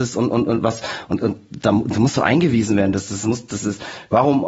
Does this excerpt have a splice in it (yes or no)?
no